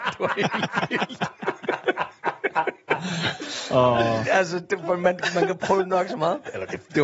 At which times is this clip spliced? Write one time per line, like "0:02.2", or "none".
none